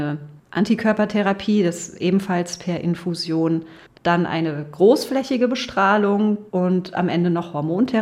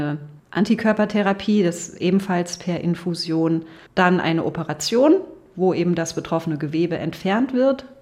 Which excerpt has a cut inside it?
first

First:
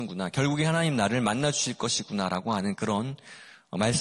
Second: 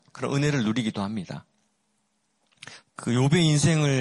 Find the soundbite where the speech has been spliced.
second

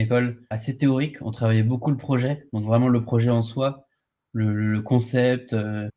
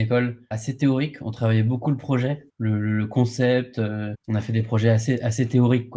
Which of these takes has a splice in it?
second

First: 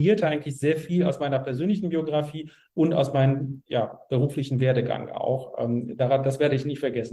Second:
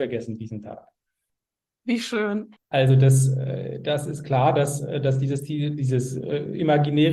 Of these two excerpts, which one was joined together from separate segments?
second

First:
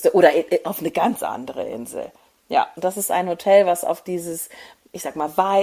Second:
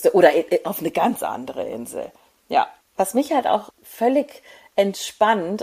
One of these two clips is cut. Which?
first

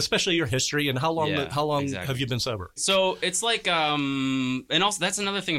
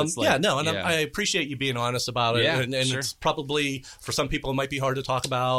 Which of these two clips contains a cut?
first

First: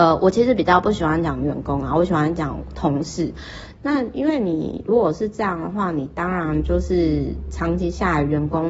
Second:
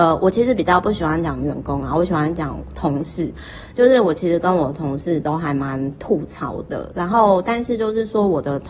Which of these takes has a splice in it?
first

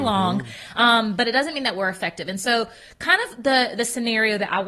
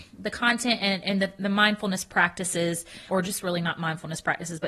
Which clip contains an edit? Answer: second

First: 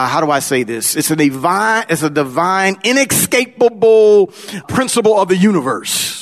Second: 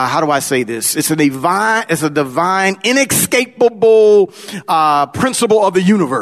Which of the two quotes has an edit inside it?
first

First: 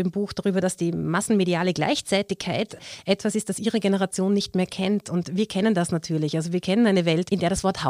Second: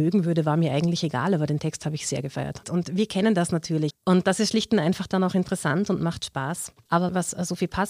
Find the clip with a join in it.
second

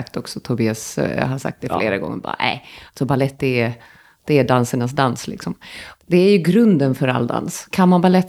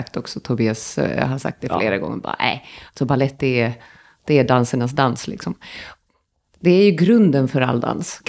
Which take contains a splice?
first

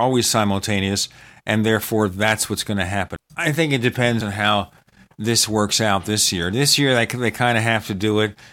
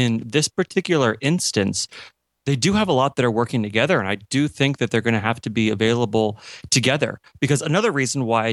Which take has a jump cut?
first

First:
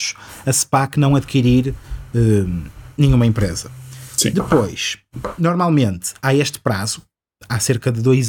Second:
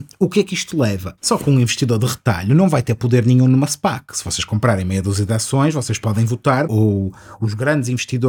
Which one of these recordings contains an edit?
second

